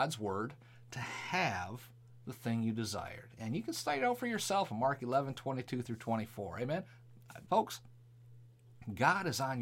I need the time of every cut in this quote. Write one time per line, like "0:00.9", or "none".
0:07.5